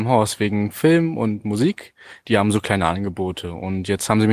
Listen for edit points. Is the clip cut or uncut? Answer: uncut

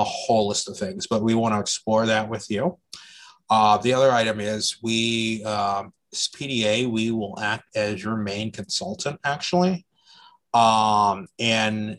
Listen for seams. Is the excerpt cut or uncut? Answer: uncut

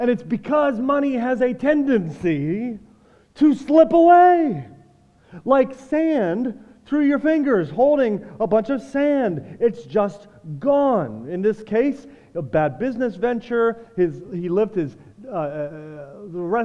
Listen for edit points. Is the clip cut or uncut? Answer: uncut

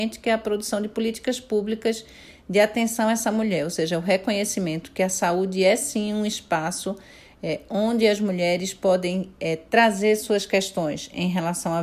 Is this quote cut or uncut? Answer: uncut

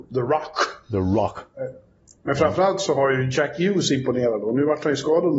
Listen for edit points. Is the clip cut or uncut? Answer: uncut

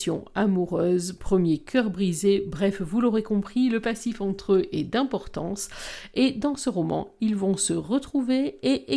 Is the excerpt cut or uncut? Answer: uncut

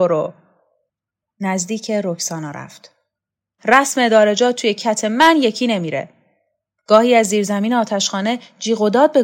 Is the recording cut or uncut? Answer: cut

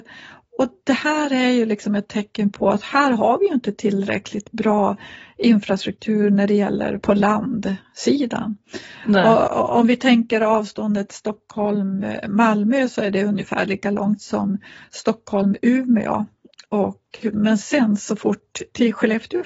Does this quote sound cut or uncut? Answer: uncut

